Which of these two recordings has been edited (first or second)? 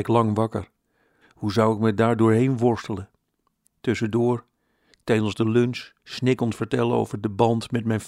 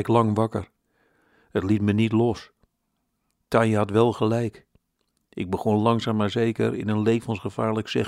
first